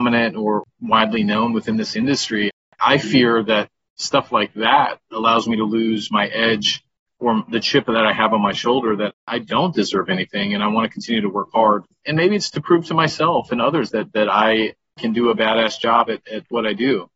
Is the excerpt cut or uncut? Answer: uncut